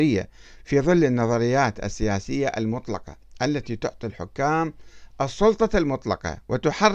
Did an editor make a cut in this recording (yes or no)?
no